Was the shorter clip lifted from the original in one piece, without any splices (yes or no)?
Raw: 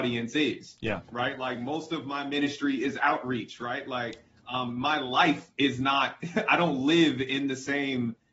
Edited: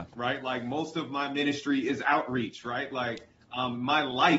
yes